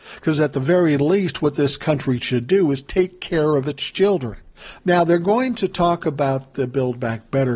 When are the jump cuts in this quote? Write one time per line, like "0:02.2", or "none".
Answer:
0:04.8